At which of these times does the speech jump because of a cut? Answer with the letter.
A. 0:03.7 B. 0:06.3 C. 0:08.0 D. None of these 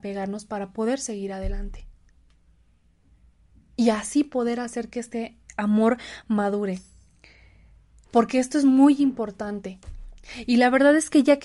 C